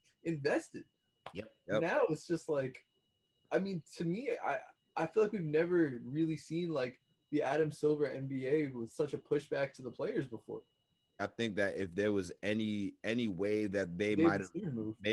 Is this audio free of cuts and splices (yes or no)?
no